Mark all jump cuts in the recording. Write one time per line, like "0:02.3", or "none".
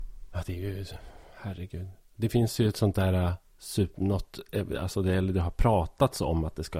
none